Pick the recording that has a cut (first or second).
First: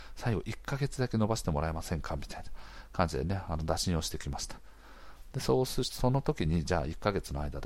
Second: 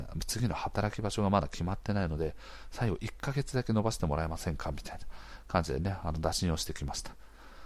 first